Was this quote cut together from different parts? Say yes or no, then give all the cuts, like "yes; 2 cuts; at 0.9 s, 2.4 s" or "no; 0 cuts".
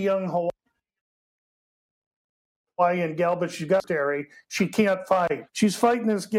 yes; 1 cut; at 5.5 s